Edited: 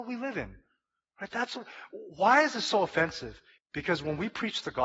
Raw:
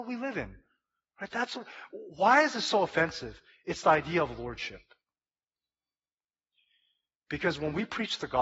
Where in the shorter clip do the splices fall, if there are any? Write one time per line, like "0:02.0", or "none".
0:03.6